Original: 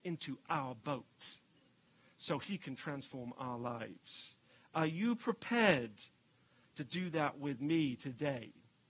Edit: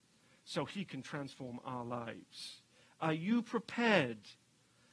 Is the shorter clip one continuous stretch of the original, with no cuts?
yes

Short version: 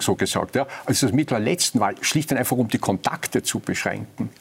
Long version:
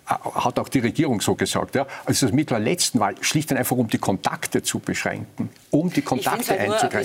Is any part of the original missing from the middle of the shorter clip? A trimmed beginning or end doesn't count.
no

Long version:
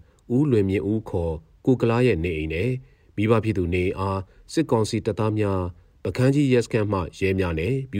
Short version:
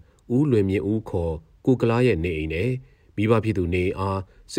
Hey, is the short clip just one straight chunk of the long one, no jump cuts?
yes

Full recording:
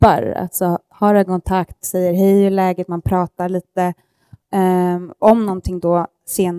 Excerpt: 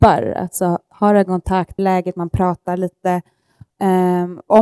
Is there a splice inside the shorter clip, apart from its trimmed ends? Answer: yes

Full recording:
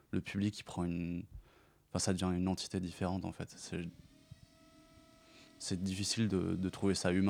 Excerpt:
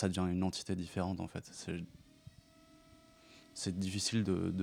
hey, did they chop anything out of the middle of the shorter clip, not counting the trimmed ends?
no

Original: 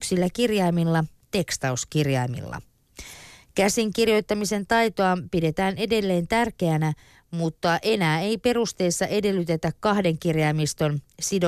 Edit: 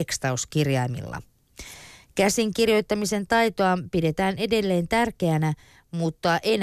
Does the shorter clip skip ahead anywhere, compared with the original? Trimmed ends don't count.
no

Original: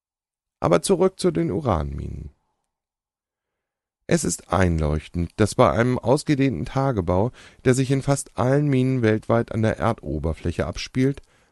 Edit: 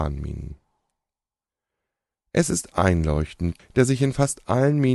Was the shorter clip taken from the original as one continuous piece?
no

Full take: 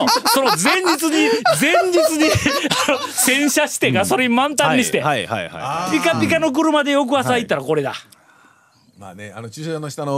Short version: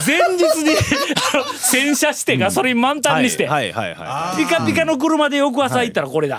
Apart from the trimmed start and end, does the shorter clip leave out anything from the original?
no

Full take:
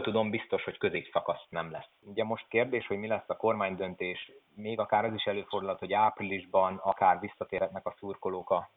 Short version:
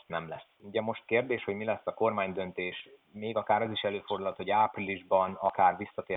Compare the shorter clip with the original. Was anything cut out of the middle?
no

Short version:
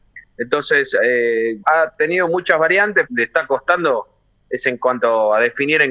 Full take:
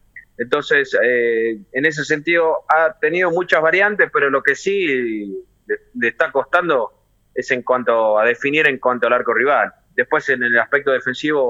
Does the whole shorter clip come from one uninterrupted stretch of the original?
no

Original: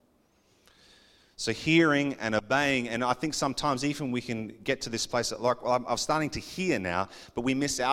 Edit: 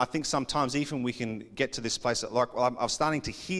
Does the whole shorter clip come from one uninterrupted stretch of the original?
yes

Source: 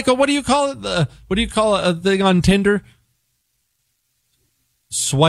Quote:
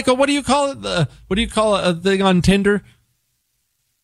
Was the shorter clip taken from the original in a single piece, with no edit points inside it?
yes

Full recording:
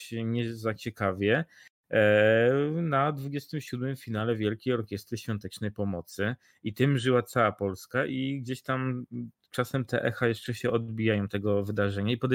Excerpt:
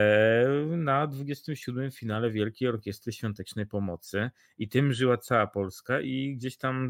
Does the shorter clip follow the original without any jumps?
yes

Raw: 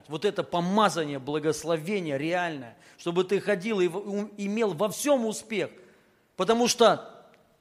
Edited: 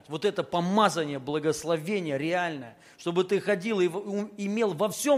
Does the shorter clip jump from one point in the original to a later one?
no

